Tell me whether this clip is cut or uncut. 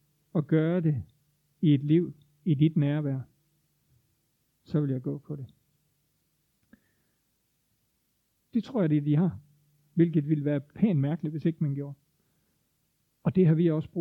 cut